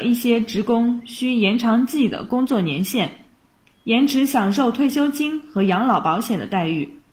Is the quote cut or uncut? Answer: uncut